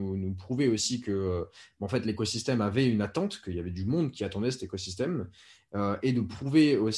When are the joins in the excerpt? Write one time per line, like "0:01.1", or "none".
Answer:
none